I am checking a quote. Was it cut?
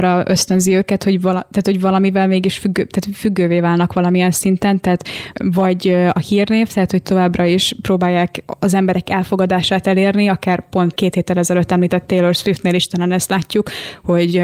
yes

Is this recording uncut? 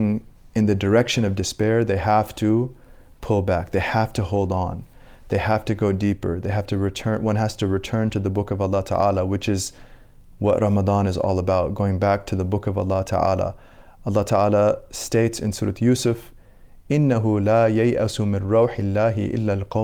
yes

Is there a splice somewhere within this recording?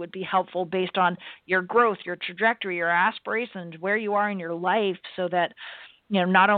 no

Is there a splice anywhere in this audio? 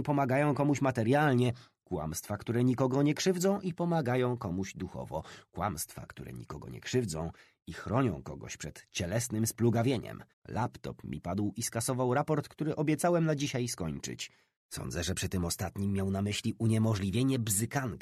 yes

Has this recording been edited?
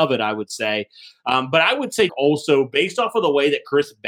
yes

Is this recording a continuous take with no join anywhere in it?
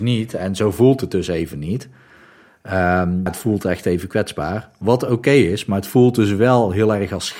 no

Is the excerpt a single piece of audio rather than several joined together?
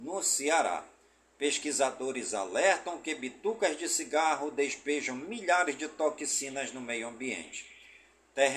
yes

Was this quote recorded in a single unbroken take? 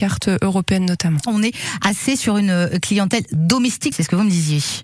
no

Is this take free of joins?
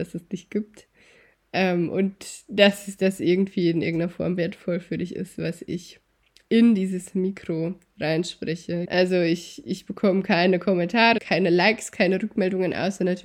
no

